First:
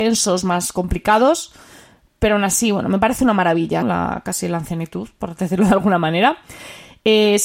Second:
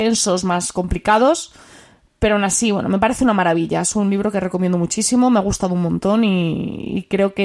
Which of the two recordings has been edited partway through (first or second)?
first